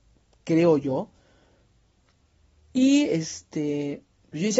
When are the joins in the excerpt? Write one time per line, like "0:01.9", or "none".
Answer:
none